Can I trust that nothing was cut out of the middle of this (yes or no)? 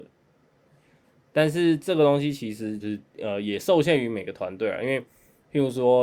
no